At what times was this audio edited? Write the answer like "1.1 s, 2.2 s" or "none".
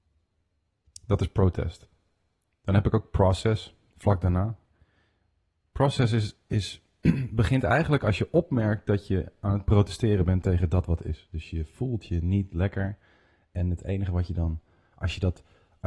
none